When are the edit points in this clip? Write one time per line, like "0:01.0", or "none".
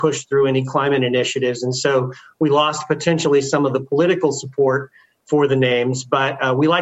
none

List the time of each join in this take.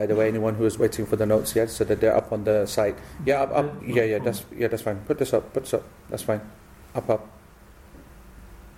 0:03.8

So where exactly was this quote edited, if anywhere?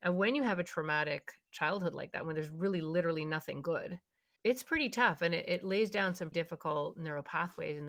0:04.4
0:06.3

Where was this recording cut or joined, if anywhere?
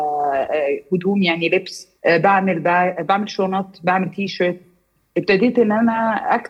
0:02.0

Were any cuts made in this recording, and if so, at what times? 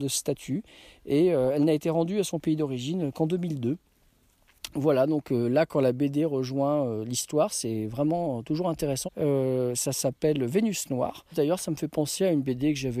0:09.0
0:11.3

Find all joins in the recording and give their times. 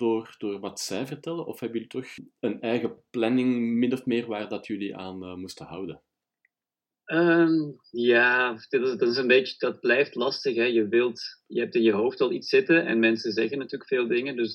none

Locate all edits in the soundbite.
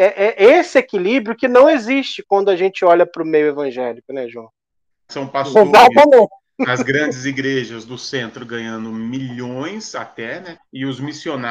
0:05.1
0:10.5

